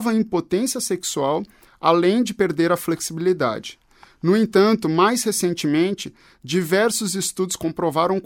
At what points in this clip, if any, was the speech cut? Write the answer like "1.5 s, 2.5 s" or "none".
none